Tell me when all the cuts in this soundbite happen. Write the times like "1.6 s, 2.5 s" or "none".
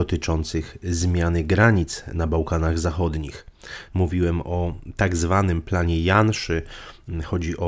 3.9 s